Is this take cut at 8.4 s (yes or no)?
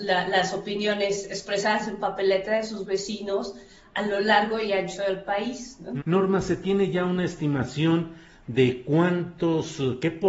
no